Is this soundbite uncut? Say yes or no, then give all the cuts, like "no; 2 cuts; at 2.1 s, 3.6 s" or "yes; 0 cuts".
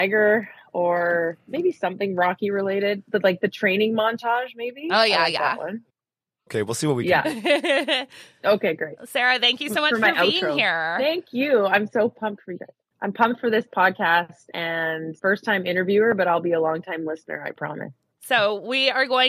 no; 2 cuts; at 15.2 s, 18.2 s